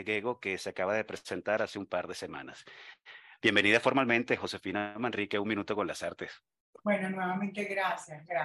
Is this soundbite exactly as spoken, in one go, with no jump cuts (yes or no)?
yes